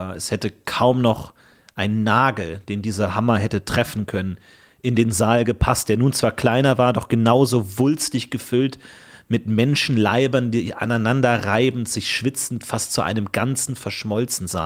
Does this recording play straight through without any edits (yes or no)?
yes